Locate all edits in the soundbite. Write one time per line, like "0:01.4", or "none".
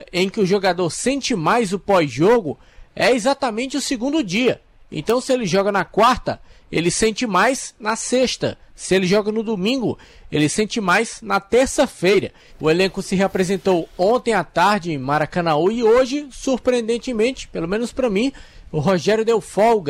0:12.5